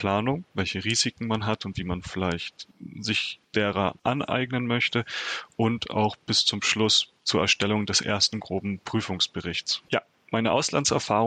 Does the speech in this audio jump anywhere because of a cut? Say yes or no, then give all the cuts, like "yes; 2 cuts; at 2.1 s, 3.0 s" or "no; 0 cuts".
yes; 2 cuts; at 7.2 s, 9.9 s